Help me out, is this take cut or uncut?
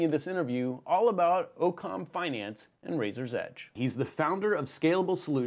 cut